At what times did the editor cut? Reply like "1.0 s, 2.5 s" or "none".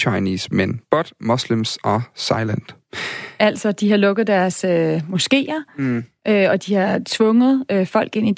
none